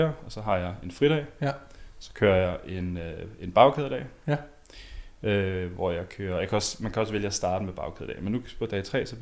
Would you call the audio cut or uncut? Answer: uncut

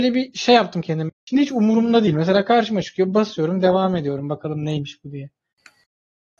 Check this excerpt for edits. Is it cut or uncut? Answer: cut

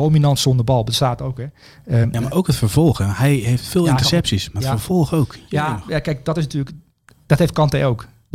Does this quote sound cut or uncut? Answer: uncut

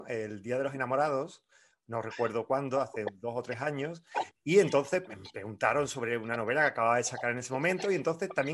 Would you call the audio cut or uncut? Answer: cut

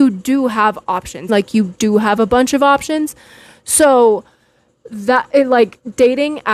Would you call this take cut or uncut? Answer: cut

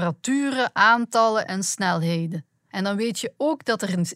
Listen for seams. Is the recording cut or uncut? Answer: cut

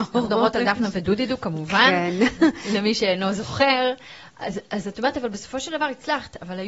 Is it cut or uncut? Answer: uncut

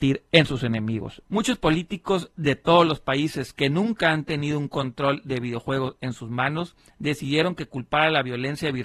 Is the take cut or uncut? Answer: cut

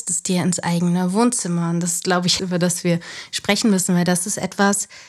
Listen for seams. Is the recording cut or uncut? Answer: cut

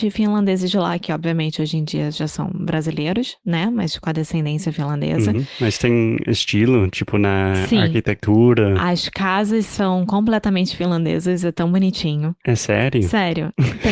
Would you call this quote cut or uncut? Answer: uncut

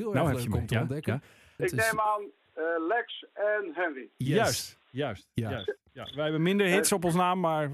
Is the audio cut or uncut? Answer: cut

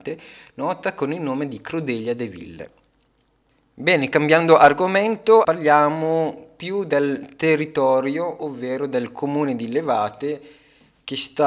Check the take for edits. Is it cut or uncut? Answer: cut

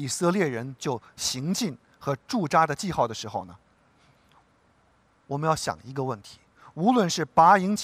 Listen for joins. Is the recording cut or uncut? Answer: uncut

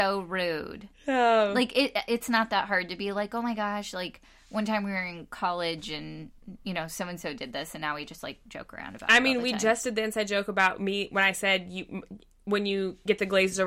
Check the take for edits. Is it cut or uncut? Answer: uncut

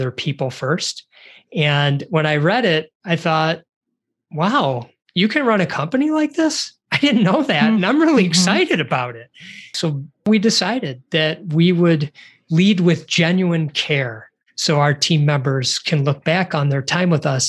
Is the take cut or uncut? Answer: uncut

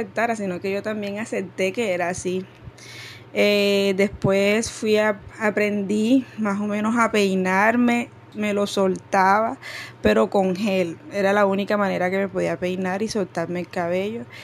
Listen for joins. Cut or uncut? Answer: cut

